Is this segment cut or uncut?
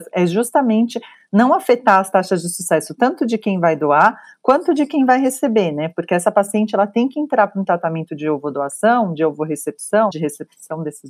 cut